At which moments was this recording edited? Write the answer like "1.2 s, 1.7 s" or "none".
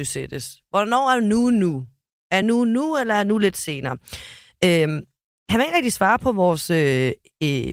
none